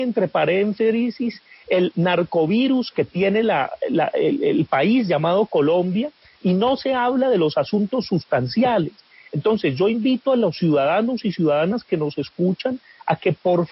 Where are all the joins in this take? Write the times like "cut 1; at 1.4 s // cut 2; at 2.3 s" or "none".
none